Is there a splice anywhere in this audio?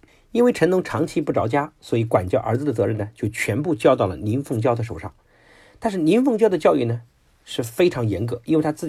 no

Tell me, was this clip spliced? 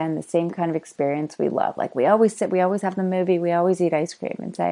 no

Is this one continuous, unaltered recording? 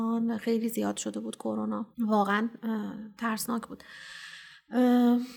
no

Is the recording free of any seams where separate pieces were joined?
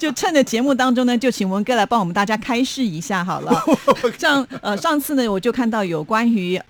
no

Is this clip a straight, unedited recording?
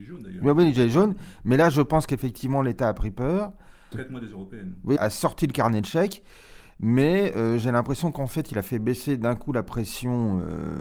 no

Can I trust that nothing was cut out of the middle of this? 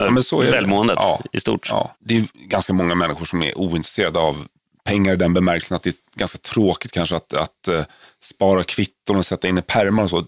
yes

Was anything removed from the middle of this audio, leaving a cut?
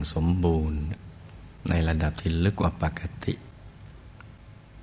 yes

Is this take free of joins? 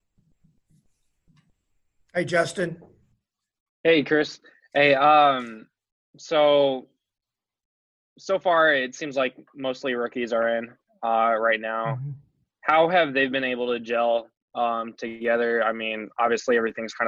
yes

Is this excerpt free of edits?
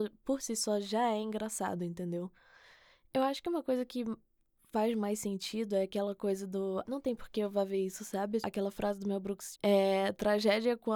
no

